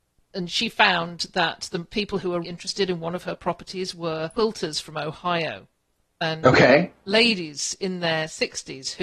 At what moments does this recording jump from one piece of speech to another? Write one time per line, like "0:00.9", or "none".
0:02.4